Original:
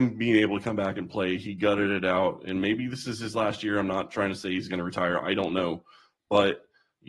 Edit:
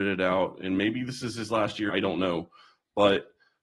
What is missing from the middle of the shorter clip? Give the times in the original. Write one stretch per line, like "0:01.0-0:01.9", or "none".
0:03.7-0:05.2